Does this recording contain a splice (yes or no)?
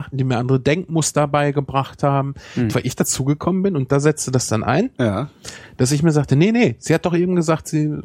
yes